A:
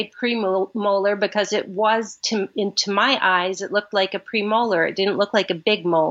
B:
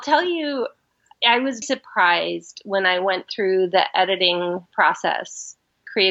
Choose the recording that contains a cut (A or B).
B